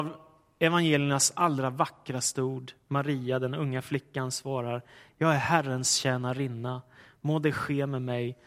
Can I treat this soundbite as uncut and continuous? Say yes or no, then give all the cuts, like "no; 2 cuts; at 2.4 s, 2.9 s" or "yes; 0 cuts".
yes; 0 cuts